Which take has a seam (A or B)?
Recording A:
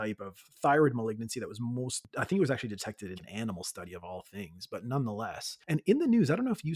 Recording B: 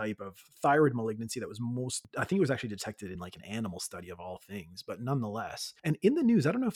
A